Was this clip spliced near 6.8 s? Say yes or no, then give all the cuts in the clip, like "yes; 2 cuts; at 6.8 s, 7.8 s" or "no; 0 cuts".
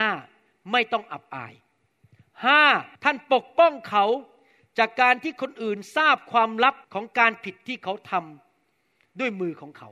yes; 2 cuts; at 3.0 s, 6.8 s